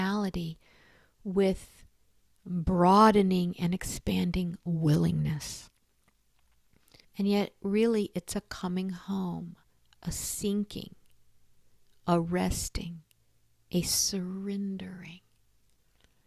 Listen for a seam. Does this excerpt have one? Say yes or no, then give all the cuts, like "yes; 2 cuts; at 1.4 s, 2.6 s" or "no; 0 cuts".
yes; 1 cut; at 7.0 s